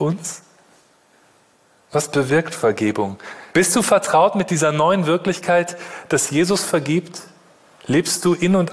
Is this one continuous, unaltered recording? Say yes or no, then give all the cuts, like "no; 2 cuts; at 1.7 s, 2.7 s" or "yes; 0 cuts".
no; 1 cut; at 3.5 s